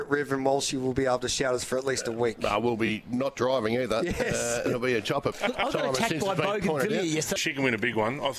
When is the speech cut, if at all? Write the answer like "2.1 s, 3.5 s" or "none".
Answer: 5.3 s, 7.4 s